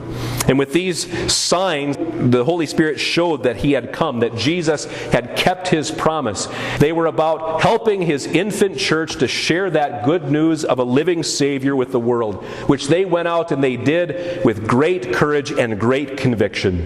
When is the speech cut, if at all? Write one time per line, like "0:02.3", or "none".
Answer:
0:02.0
0:06.8